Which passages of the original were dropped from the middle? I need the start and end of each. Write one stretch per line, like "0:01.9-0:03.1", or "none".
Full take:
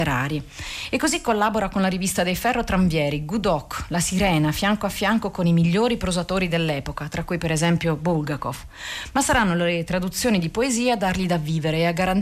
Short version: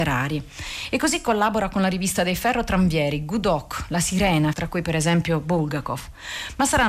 0:04.5-0:07.1

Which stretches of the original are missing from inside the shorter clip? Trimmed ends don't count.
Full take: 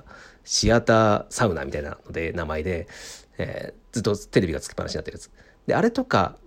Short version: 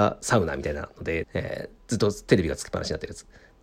0:02.3-0:03.3

